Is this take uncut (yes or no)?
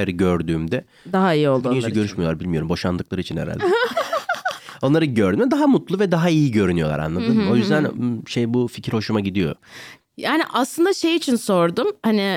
yes